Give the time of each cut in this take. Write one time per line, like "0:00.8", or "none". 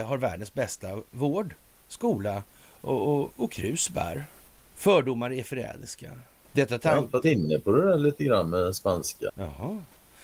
0:04.7
0:06.4
0:09.3